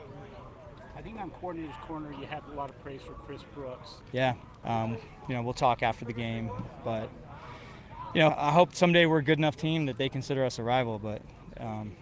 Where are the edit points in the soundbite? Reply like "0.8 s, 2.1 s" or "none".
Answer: 4.6 s, 8.3 s